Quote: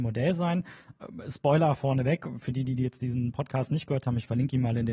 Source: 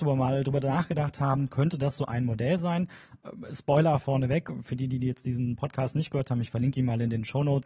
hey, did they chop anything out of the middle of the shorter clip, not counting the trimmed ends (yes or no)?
no